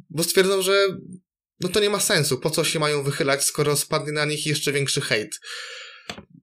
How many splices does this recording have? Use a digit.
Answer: 0